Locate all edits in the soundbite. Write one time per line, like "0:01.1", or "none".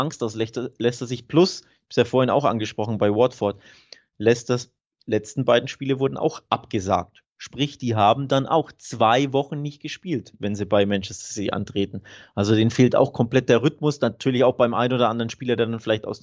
none

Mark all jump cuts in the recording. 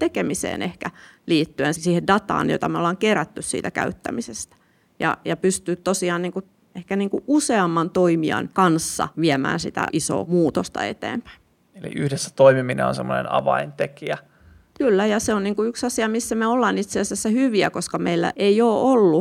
0:01.7

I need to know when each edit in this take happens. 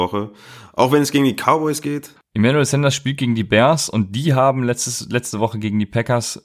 0:02.2

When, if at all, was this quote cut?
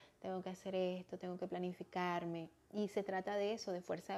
none

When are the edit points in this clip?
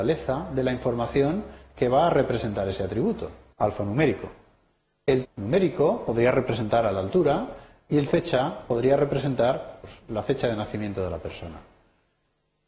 0:03.5
0:05.2
0:08.1

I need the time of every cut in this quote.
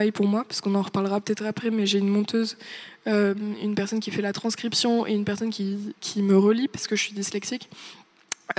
none

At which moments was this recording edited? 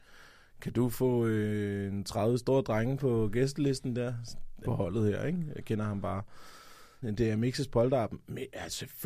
0:04.6
0:07.0

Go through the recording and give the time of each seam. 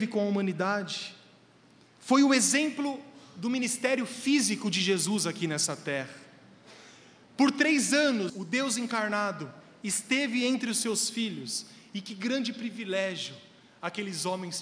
0:08.3

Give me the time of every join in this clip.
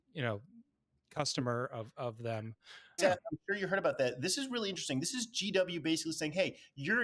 0:03.0

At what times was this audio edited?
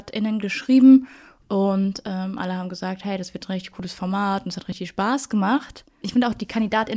0:06.0

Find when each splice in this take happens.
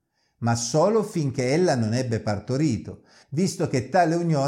0:03.2

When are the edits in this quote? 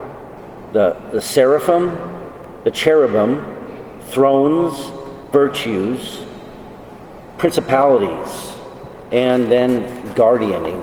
0:05.3
0:07.4
0:09.1

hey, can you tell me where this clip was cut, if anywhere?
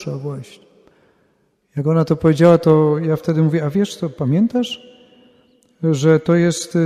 none

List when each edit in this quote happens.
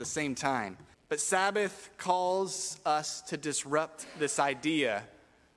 0:00.9

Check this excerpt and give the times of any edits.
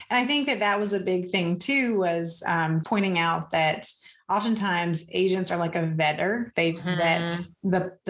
0:02.8
0:06.5

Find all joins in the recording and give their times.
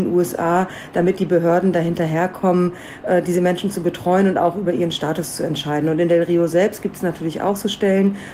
none

